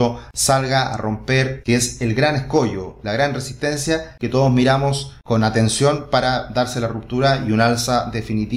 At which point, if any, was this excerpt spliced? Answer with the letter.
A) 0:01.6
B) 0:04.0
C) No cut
A